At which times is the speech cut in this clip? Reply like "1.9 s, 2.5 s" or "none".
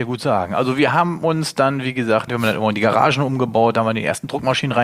2.3 s